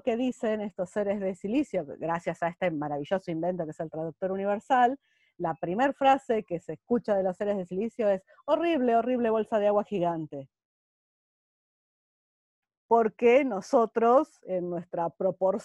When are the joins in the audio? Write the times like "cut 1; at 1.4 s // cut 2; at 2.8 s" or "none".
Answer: none